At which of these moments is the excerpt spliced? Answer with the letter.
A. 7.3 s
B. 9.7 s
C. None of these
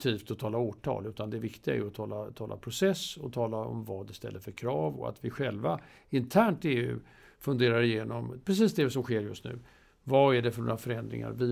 C